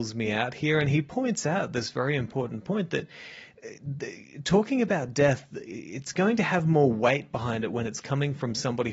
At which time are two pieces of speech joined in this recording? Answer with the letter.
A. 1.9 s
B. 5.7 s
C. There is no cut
C